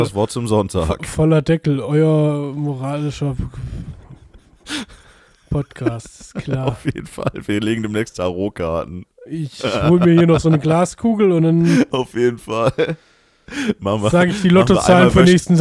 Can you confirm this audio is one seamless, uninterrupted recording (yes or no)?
no